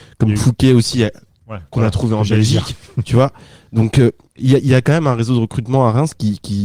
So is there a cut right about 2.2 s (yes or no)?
no